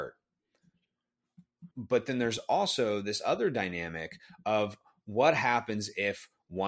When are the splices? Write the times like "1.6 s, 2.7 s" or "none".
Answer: 1.7 s